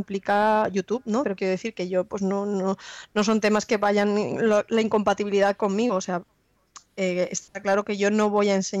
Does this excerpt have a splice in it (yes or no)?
yes